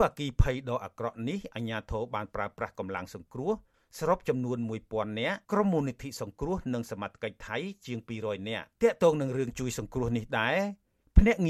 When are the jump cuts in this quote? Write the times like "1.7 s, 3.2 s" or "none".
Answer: 5.4 s, 8.7 s

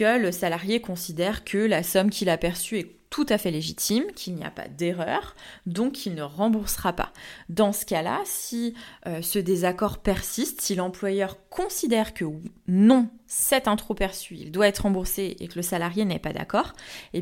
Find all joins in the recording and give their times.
none

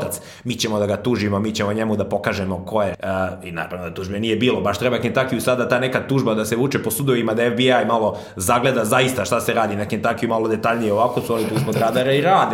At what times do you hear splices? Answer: 2.9 s

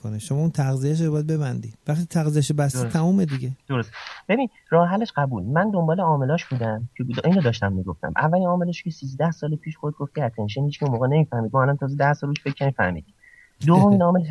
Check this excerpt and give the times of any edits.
1.8 s, 3.6 s

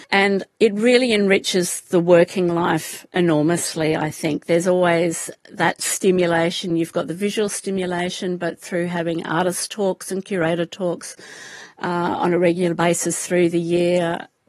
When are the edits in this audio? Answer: none

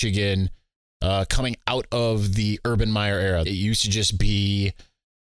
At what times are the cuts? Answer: 3.5 s

